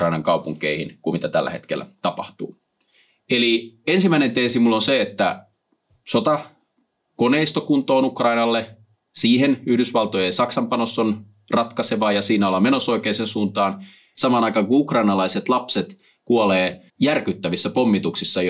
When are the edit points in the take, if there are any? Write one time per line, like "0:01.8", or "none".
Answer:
0:03.1
0:14.1
0:16.9